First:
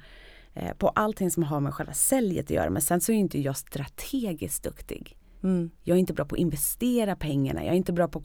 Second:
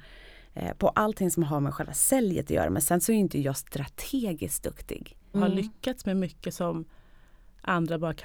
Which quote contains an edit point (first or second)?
second